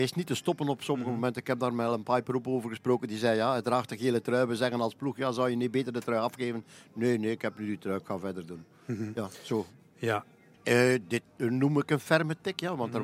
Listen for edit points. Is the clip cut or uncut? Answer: cut